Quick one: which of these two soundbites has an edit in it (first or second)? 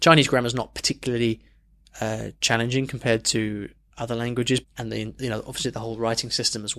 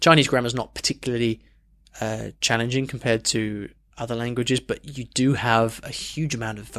first